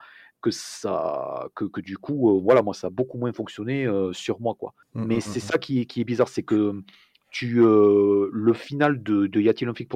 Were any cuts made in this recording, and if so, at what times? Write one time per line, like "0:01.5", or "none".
0:04.8